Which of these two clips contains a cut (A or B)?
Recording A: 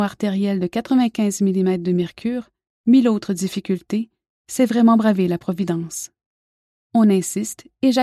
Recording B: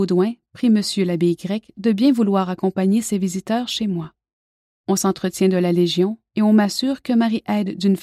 B